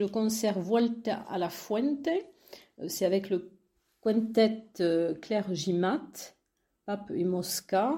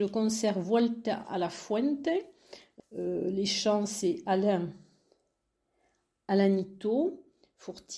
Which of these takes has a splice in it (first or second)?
second